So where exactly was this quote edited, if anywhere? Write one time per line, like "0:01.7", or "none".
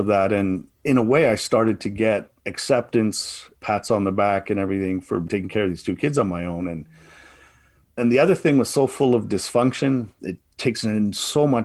0:03.6